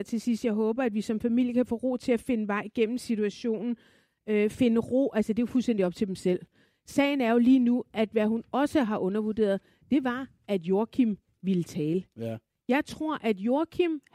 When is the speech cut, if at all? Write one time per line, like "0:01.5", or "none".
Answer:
none